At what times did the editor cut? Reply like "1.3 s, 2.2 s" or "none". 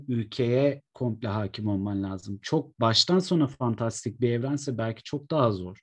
none